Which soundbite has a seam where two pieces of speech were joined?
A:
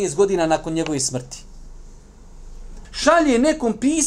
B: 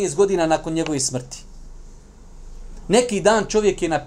A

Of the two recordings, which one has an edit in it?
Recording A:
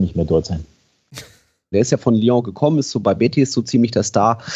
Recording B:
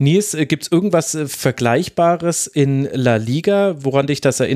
A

